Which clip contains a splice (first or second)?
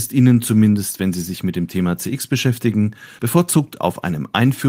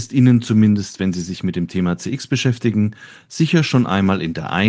first